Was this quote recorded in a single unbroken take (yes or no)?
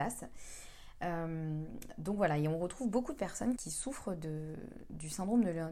no